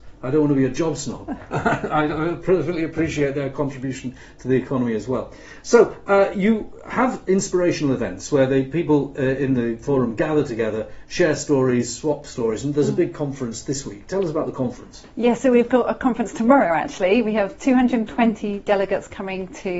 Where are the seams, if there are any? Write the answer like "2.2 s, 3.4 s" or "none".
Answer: none